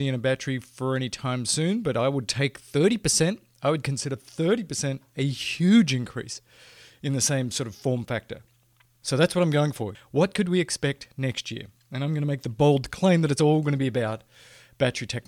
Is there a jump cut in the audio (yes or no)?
yes